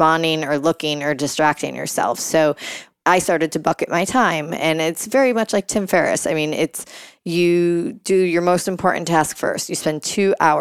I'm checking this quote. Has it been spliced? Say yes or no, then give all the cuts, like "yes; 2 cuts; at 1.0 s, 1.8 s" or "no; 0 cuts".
no; 0 cuts